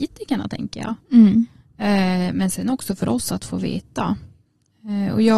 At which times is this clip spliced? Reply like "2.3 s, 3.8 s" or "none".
none